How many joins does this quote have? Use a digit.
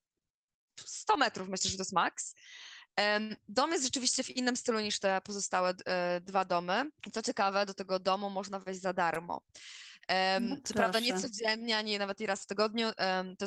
1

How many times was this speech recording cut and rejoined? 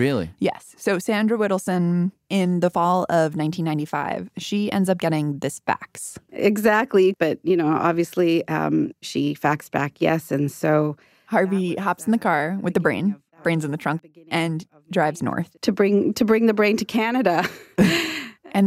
2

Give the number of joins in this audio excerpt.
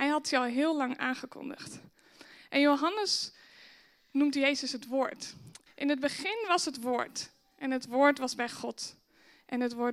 1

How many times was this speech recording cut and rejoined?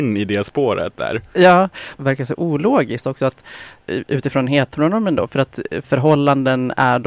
3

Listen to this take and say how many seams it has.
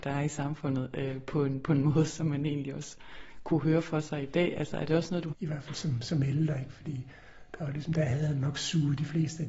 1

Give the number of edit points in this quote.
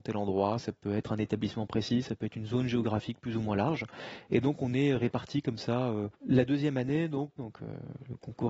2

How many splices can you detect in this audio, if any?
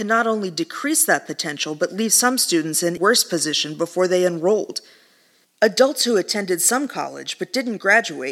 2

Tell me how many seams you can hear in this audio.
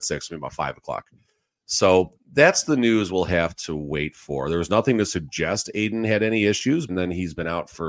1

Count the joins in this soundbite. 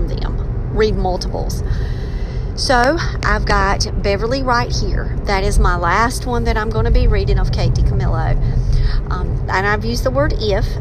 1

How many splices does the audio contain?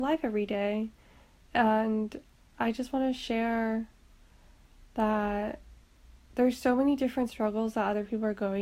0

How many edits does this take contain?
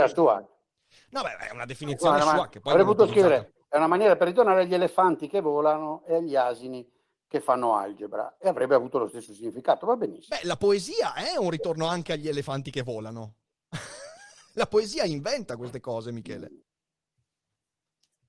0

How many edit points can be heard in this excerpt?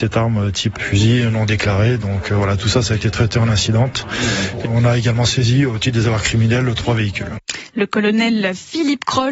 1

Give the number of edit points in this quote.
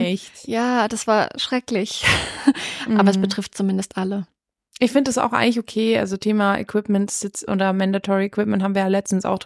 1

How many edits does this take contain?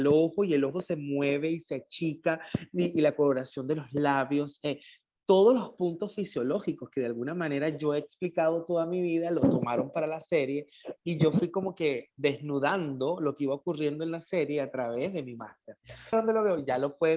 1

